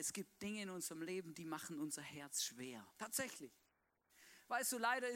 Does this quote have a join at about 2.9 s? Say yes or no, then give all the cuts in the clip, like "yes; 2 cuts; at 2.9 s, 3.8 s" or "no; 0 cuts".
yes; 1 cut; at 2.9 s